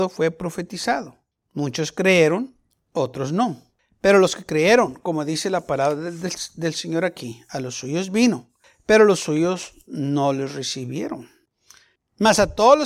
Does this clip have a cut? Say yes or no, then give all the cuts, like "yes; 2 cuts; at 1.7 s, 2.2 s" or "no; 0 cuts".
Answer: no; 0 cuts